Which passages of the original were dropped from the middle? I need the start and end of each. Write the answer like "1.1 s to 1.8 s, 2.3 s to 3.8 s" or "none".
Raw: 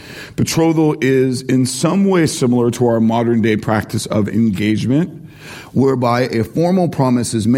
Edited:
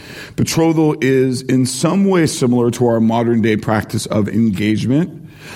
none